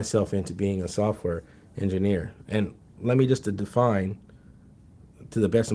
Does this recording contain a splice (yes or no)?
no